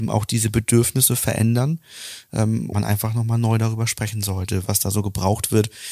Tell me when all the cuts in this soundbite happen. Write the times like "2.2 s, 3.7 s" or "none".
2.7 s, 4.6 s